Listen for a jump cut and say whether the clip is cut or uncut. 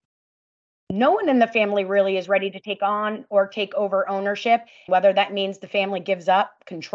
cut